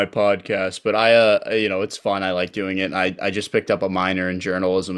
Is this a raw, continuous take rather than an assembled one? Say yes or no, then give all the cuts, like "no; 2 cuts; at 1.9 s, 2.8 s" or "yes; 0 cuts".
yes; 0 cuts